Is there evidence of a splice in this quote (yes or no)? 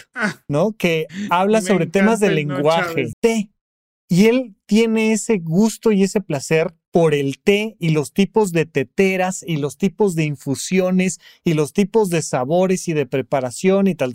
yes